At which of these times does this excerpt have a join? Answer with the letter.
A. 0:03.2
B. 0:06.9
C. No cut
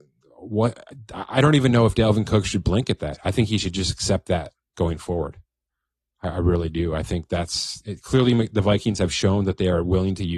C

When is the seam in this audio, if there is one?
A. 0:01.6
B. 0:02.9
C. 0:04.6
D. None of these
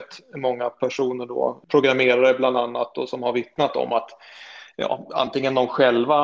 A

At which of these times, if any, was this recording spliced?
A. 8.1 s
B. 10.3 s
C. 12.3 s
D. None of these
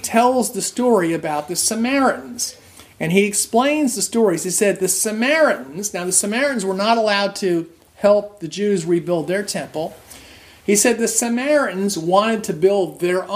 D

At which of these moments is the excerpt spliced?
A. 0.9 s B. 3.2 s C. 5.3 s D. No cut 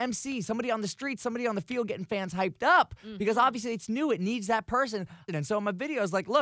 C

